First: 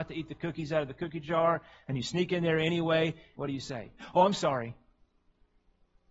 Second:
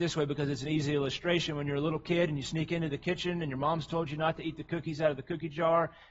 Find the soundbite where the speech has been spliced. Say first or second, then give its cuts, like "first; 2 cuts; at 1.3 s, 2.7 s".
first; 1 cut; at 3.3 s